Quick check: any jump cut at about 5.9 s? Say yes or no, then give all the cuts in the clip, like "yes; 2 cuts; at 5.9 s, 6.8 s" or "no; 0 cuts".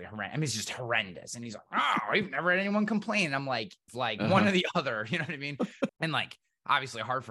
yes; 2 cuts; at 3.9 s, 5.9 s